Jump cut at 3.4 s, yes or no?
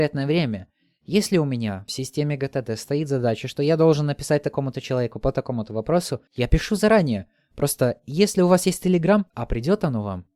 no